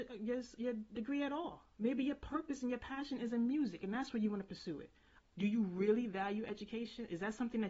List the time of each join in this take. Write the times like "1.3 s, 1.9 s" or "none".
5.2 s